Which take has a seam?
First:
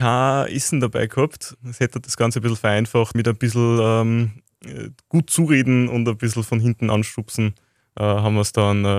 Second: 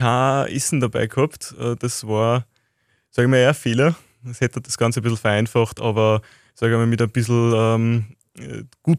first; 2 cuts; at 1.5 s, 3.1 s

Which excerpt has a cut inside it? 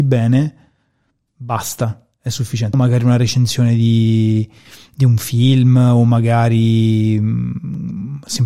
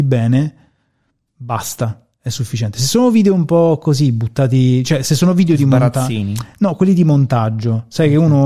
first; 1 cut; at 2.7 s

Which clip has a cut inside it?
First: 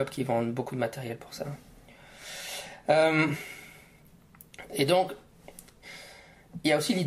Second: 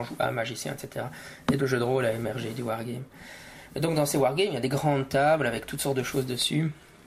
second; 1 cut; at 1.6 s

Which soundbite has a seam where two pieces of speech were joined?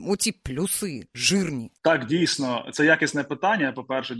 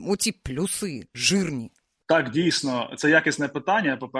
first; 1 cut; at 1.8 s

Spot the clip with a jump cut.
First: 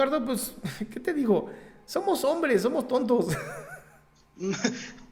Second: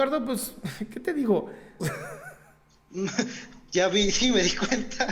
second; 1 cut; at 1.8 s

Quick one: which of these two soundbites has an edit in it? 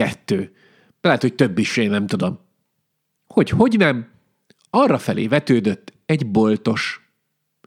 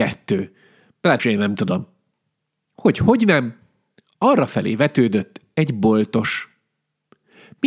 second; 1 cut; at 1.2 s

